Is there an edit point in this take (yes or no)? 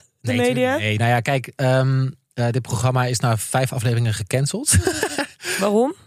no